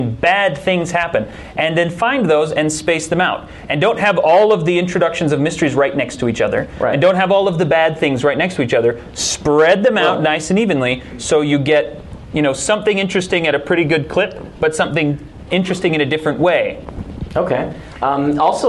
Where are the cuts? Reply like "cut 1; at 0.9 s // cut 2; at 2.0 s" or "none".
none